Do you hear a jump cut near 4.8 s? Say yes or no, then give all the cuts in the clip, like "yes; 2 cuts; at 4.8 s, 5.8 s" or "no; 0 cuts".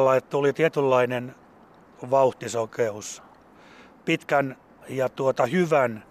yes; 1 cut; at 4.8 s